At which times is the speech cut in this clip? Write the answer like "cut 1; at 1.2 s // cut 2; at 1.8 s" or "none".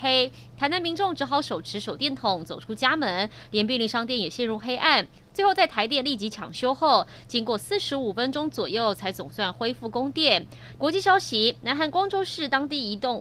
cut 1; at 10.8 s